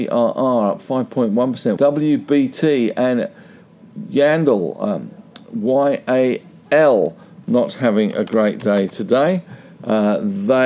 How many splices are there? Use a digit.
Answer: 1